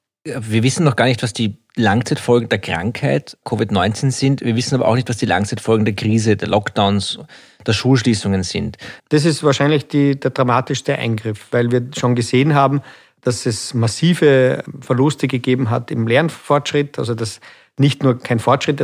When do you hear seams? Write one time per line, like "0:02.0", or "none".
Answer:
0:09.0